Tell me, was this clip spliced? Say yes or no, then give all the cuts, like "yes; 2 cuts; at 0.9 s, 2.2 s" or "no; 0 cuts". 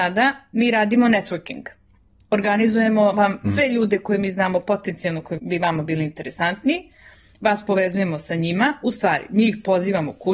yes; 1 cut; at 5.4 s